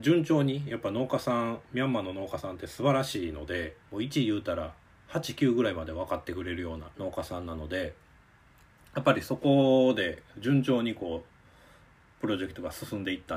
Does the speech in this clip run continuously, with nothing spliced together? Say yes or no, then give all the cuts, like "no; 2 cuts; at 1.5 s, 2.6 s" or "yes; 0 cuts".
no; 2 cuts; at 3.8 s, 6.9 s